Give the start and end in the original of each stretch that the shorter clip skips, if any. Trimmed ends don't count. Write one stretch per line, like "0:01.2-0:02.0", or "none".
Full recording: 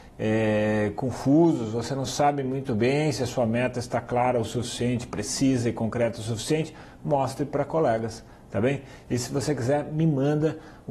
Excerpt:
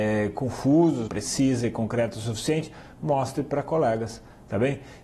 0:01.7-0:05.1